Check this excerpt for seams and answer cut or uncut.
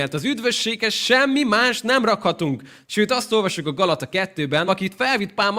cut